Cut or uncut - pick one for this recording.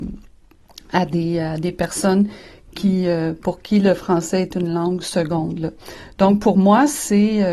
uncut